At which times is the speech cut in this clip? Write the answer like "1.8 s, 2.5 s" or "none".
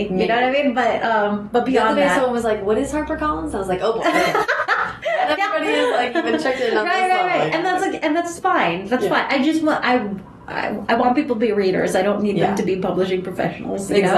none